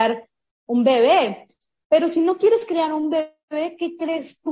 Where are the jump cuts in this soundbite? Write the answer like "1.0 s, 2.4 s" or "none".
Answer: none